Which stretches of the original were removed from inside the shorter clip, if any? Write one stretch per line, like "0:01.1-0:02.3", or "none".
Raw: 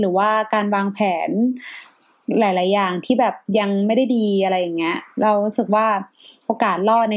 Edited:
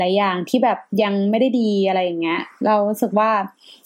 none